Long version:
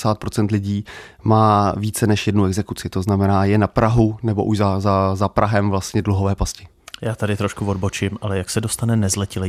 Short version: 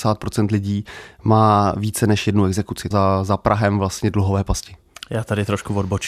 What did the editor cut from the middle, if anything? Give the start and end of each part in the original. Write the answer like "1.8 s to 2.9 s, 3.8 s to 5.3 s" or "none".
2.9 s to 4.8 s